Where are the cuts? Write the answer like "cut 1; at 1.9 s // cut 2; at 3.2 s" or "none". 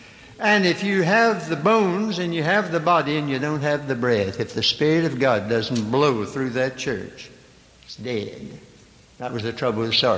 none